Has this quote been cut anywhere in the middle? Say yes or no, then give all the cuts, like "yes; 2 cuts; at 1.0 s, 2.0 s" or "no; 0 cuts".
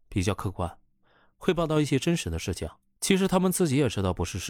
yes; 1 cut; at 3.0 s